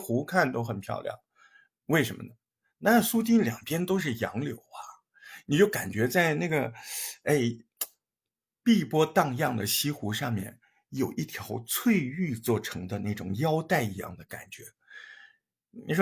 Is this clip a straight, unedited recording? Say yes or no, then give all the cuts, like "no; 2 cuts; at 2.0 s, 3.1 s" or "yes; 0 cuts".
yes; 0 cuts